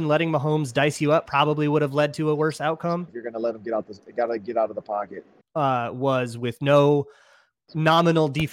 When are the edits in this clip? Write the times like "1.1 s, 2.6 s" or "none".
3.1 s, 5.4 s